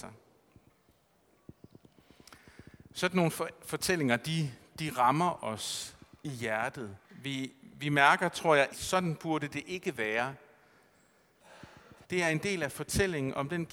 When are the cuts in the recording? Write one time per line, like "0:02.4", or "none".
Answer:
0:07.0
0:08.7
0:12.0